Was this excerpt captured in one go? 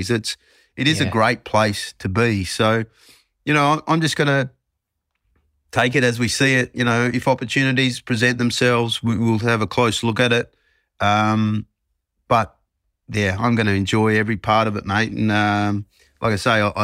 yes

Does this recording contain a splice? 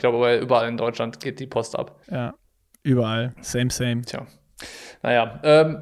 yes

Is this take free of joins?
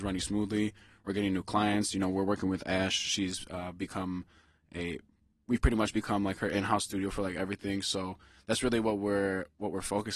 yes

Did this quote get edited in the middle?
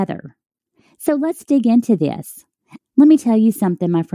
yes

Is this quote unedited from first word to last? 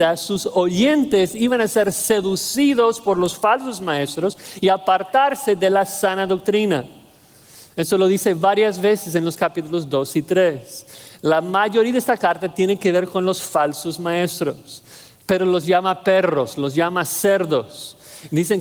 yes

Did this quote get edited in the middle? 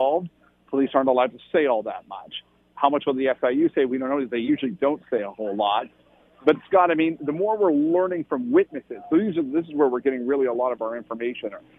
no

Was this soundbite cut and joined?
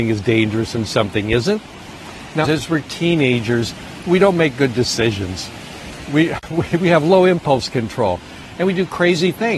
yes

